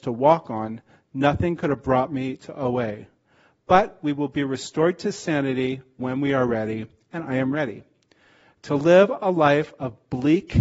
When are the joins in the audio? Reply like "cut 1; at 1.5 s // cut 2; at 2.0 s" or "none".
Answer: none